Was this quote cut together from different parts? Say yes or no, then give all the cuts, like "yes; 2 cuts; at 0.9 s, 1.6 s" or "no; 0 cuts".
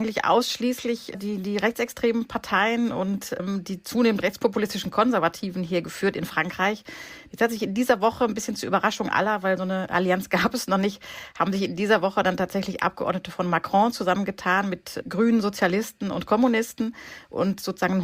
yes; 1 cut; at 7.3 s